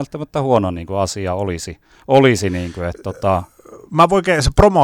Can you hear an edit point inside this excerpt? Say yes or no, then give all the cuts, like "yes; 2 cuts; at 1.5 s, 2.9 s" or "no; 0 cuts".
no; 0 cuts